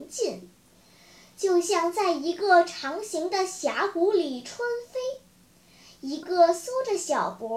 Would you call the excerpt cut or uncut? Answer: cut